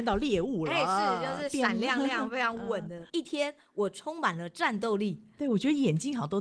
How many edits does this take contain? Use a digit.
1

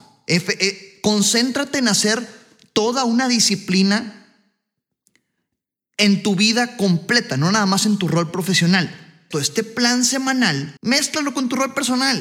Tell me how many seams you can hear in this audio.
2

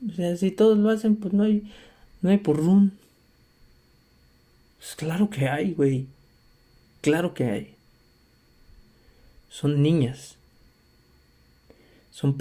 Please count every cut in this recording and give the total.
0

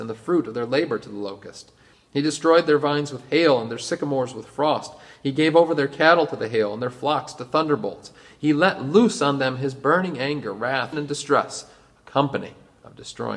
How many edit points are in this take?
1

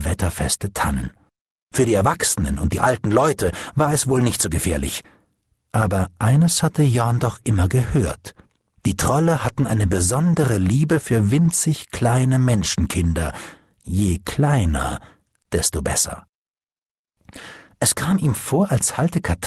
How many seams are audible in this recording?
1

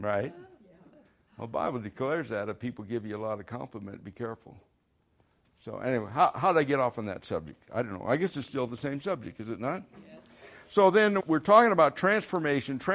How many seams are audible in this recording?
1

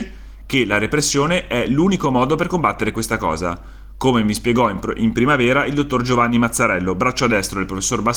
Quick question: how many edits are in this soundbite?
0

